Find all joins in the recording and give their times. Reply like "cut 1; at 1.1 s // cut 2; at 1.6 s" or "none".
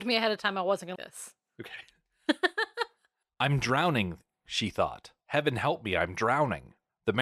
cut 1; at 0.9 s // cut 2; at 5.2 s